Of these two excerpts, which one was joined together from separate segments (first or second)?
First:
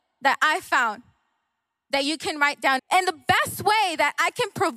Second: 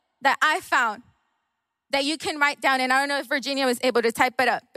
first